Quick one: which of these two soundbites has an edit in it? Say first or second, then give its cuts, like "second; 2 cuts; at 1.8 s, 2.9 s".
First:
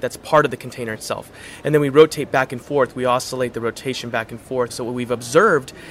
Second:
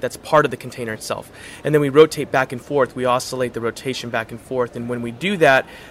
first; 1 cut; at 4.7 s